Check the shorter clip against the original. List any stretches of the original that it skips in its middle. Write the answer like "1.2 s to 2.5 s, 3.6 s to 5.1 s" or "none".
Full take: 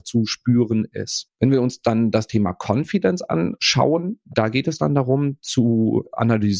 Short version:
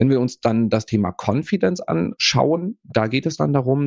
none